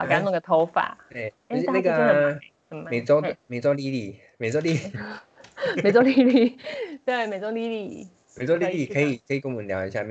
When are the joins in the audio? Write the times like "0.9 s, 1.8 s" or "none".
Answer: none